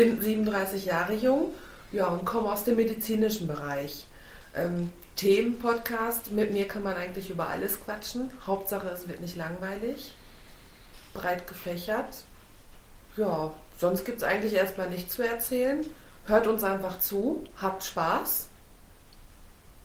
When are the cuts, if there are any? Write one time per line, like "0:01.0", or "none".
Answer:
0:13.0